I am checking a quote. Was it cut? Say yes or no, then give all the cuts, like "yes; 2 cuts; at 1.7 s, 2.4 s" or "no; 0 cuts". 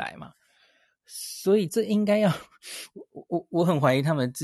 yes; 1 cut; at 1.7 s